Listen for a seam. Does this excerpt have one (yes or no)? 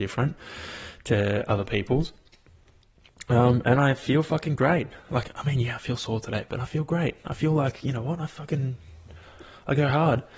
no